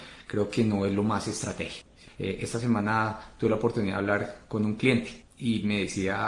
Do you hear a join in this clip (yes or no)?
no